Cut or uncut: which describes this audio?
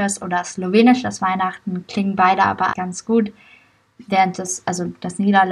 cut